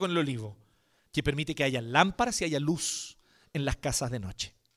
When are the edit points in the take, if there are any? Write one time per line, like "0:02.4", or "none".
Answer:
0:01.1